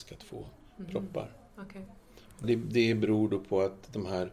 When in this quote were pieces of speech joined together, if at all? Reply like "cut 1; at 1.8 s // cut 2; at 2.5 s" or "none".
cut 1; at 2.4 s